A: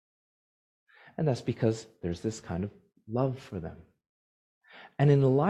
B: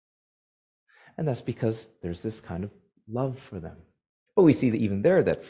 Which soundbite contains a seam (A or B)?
B